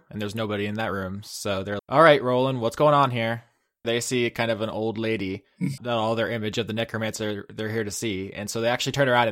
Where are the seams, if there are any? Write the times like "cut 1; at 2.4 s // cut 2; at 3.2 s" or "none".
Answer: cut 1; at 1.8 s // cut 2; at 3.8 s // cut 3; at 5.8 s